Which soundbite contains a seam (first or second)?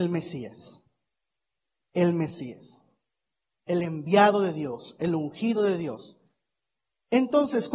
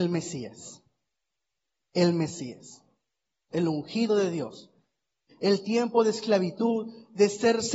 second